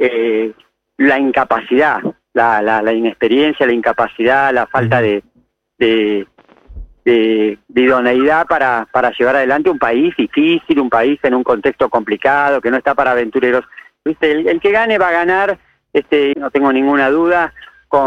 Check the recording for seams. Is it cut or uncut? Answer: cut